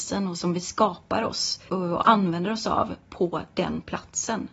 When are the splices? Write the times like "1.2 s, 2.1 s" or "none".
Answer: 1.7 s